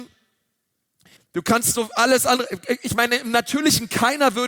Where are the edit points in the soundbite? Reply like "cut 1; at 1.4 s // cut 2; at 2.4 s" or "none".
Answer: cut 1; at 1.2 s